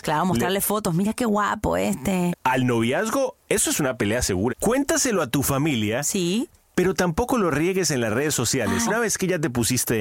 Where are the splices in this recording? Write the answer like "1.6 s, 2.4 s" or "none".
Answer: 2.3 s, 4.5 s, 8.9 s